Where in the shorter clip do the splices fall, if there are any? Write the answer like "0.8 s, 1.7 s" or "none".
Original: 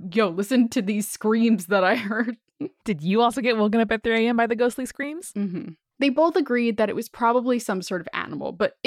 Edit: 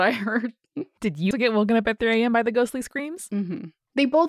1.3 s